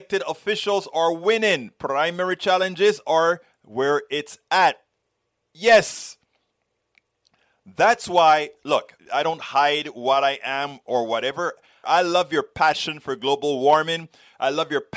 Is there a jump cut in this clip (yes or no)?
yes